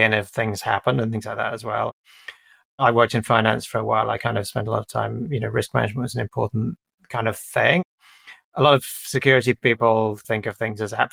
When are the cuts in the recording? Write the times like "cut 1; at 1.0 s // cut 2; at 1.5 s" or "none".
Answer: none